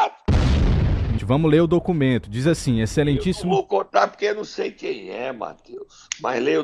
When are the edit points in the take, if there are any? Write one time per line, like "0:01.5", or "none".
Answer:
0:01.2